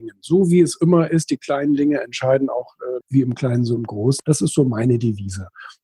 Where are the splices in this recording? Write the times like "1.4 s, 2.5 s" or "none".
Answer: 3.0 s, 4.2 s